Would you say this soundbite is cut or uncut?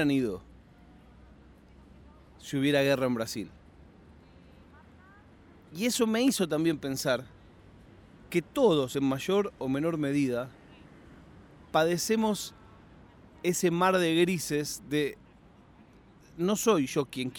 uncut